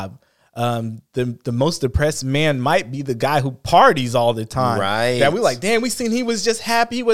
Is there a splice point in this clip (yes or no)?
no